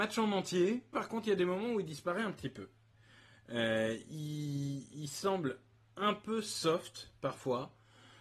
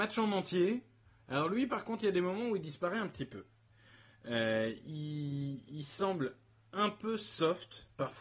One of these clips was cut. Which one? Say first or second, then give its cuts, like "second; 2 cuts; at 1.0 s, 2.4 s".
first; 1 cut; at 0.9 s